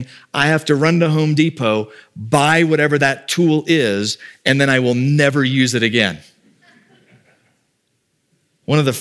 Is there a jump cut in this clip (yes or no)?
no